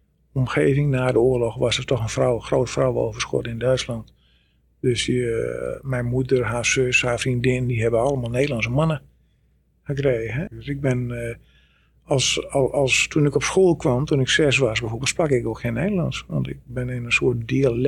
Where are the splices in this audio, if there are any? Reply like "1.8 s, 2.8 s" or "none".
10.5 s